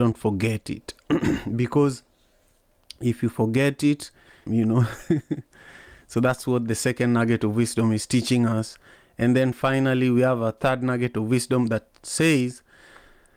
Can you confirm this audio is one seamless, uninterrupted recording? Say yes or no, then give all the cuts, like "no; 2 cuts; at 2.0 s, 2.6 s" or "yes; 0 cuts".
no; 1 cut; at 4.5 s